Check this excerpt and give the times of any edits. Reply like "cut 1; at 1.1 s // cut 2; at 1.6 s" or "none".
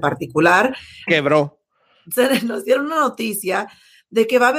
cut 1; at 1.1 s

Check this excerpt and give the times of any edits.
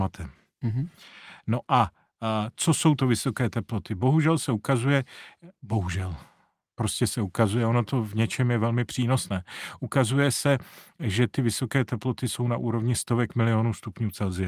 none

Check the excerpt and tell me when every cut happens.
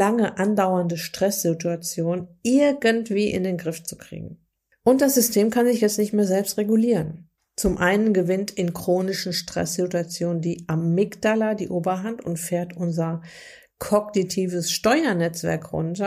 none

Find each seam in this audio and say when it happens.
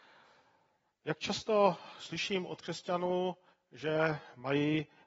none

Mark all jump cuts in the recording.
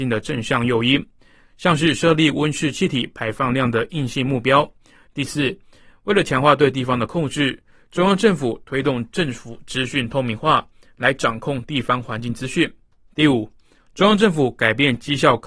cut 1; at 5.1 s

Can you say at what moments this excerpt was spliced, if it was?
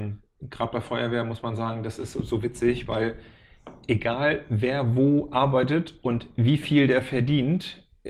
none

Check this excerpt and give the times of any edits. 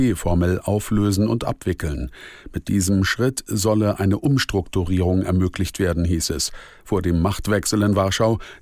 cut 1; at 6.8 s

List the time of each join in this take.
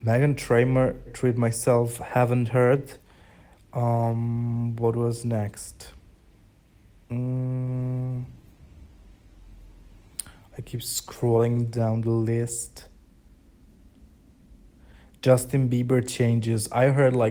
cut 1; at 1.1 s

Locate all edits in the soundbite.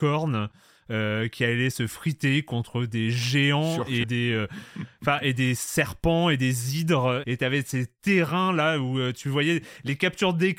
cut 1; at 4.0 s // cut 2; at 7.2 s

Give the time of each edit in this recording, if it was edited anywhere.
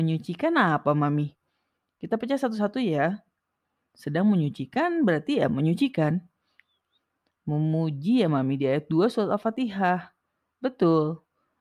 cut 1; at 3.9 s // cut 2; at 7.3 s

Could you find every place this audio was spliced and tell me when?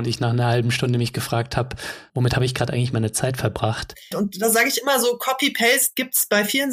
cut 1; at 4.1 s

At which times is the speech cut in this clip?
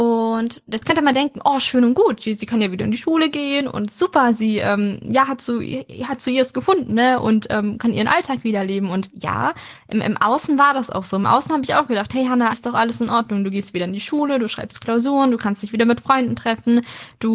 cut 1; at 12.5 s

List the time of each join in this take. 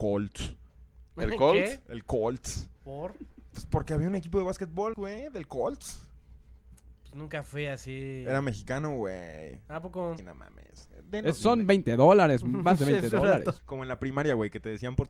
cut 1; at 4.9 s // cut 2; at 10.2 s // cut 3; at 13.6 s

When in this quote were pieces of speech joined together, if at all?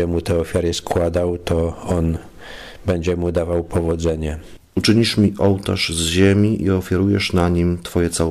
cut 1; at 4.6 s

